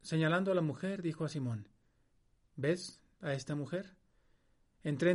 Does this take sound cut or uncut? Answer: uncut